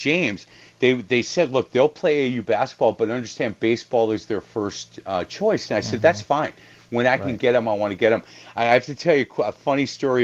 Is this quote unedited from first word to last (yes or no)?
yes